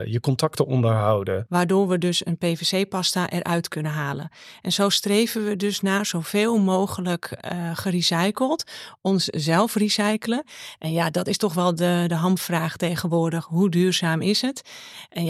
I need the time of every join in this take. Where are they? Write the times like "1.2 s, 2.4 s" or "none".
1.5 s